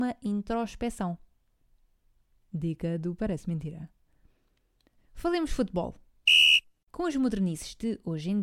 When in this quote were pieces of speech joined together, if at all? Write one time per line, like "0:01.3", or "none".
0:05.0
0:06.9